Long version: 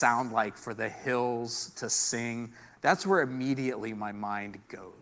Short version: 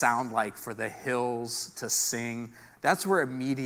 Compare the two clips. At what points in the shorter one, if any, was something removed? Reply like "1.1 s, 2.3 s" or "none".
none